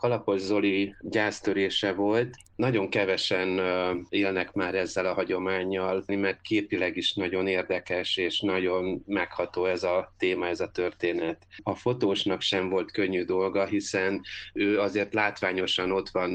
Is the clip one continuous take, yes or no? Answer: no